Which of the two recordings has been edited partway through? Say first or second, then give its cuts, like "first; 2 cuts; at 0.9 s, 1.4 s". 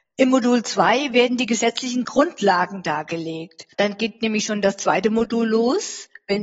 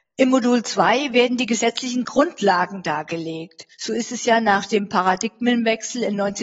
first; 1 cut; at 3.7 s